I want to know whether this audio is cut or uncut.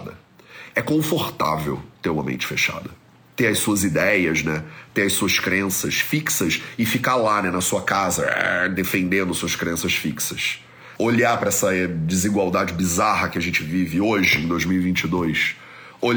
cut